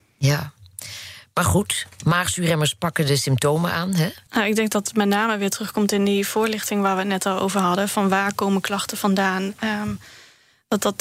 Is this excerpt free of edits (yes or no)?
no